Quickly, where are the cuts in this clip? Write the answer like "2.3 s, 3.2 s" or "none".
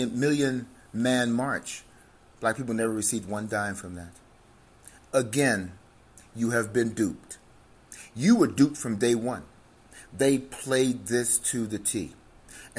none